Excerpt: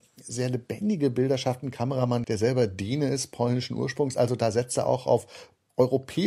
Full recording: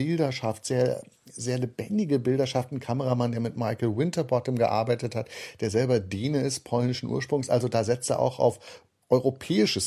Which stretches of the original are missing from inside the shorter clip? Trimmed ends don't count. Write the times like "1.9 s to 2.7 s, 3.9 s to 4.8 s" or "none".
3.3 s to 5.6 s

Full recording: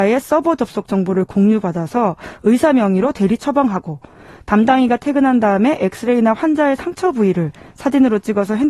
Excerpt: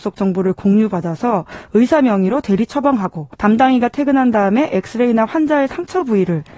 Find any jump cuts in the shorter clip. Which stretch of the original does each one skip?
4.1 s to 4.4 s

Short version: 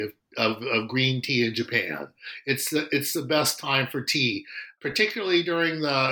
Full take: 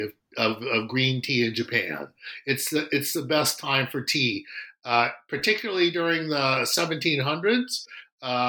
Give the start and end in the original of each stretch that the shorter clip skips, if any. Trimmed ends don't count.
4.8 s to 5.3 s

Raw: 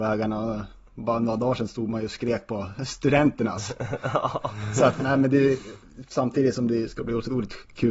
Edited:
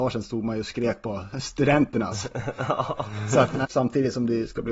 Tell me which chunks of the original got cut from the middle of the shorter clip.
5.1 s to 6.0 s

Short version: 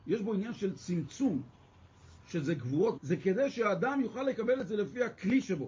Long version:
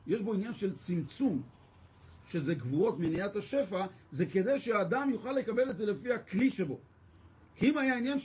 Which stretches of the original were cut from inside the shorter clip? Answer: 3.0 s to 4.1 s

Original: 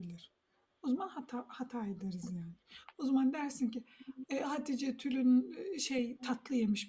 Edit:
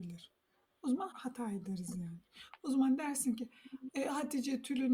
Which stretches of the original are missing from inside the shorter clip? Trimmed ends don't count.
1.1 s to 1.5 s

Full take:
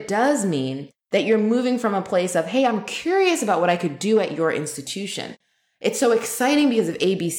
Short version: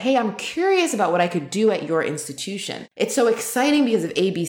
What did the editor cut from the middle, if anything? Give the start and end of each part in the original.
5.4 s to 5.8 s

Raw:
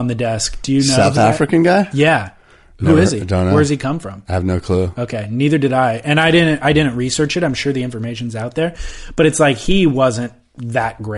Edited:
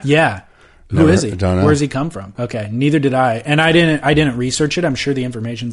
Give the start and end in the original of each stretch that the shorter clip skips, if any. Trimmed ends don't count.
4.2 s to 4.9 s

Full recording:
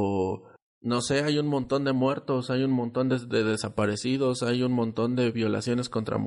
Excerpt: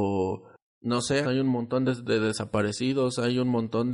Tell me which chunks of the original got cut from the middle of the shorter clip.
1.2 s to 2.5 s

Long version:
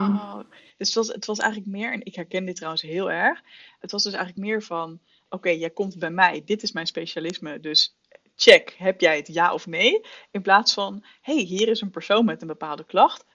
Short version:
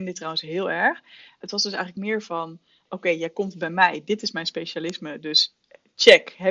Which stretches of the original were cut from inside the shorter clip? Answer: none

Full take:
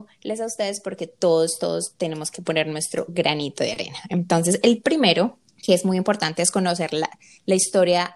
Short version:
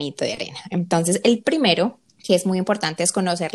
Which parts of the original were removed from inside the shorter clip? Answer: none

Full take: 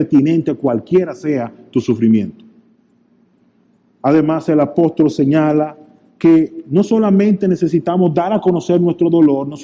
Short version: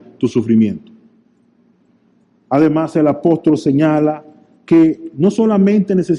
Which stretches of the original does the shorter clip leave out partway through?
none

